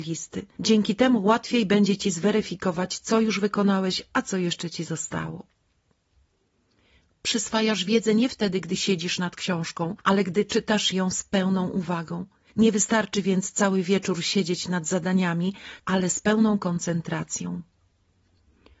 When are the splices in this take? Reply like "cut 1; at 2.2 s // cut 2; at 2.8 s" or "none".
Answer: cut 1; at 7.1 s // cut 2; at 15.8 s